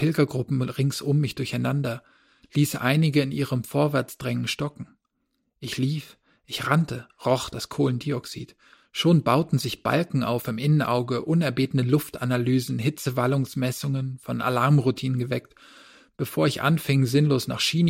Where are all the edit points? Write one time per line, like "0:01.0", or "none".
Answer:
none